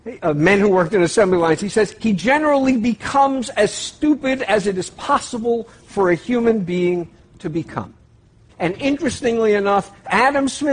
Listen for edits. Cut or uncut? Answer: cut